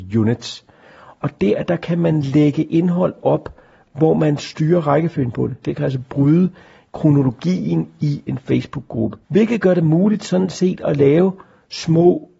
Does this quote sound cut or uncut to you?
cut